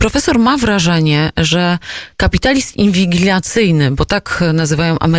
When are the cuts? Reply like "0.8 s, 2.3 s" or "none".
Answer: none